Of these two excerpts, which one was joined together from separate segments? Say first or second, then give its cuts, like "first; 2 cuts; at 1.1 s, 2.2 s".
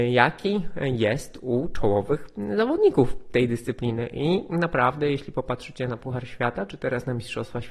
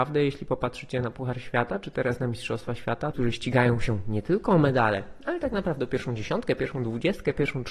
second; 1 cut; at 3.1 s